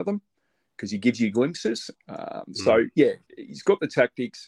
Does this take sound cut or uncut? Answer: cut